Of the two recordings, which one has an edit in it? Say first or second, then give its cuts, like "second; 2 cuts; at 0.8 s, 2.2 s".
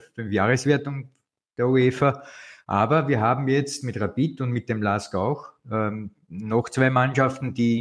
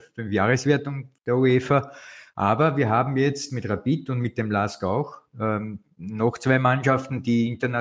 second; 1 cut; at 1.2 s